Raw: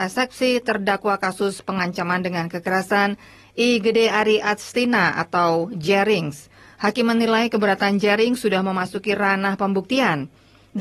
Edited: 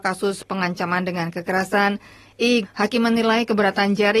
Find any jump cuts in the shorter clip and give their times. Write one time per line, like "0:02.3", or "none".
0:02.6